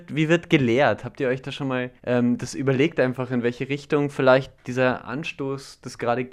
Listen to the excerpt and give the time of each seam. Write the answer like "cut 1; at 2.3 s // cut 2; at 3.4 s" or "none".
cut 1; at 2.0 s